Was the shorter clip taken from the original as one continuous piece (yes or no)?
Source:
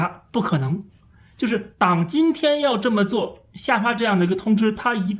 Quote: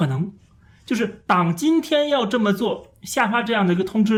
yes